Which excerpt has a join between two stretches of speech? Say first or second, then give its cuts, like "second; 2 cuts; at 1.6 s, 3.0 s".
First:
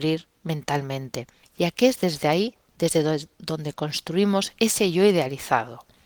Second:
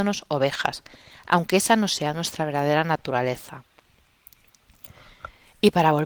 first; 1 cut; at 1.4 s